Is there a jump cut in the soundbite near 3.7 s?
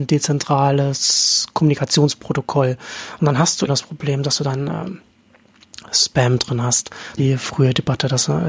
yes; 2 cuts; at 3.7 s, 7.2 s

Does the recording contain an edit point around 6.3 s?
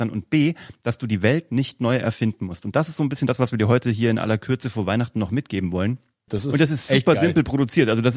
yes; 1 cut; at 6.3 s

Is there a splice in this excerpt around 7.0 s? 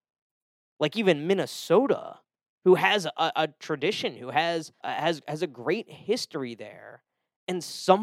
no; 1 cut; at 4.8 s

